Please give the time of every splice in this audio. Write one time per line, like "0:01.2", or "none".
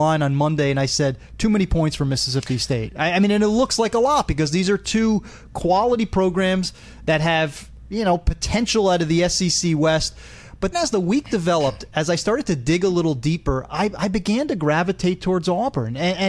0:10.7